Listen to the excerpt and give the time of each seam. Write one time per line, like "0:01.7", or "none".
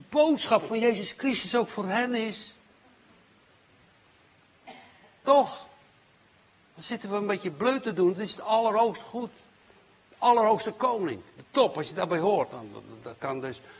none